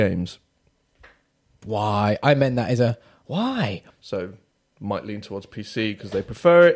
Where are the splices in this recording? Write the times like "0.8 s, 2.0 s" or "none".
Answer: 1.6 s, 3.9 s